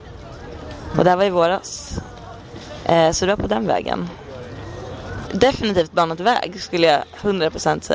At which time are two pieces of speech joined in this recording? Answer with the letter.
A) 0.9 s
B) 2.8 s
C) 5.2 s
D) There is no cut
C